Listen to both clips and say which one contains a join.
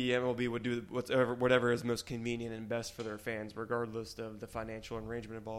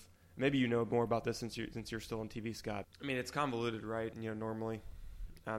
second; 2 cuts; at 2.8 s, 4.1 s

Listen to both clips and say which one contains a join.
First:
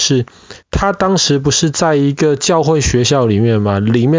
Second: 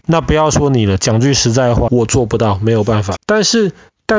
second; 2 cuts; at 1.9 s, 3.2 s

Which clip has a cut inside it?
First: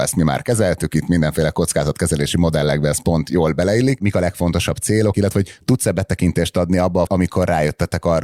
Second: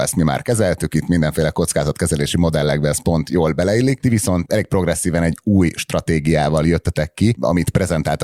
first; 3 cuts; at 4.0 s, 5.1 s, 7.1 s

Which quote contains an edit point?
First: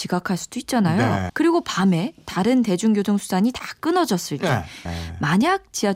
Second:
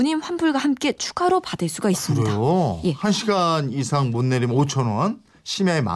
first; 2 cuts; at 1.3 s, 4.9 s

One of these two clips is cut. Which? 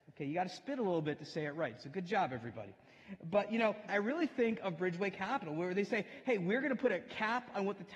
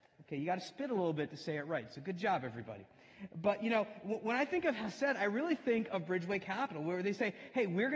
first; 1 cut; at 3.9 s

